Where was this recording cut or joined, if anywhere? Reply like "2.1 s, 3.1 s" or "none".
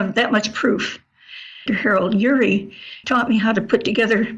1.7 s, 3.0 s